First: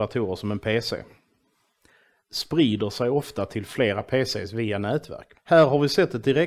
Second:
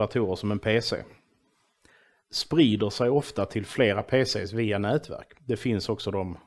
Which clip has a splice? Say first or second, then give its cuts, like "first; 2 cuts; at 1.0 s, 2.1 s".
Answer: first; 1 cut; at 5.4 s